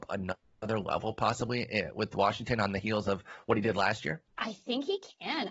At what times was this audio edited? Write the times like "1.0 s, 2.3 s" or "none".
4.3 s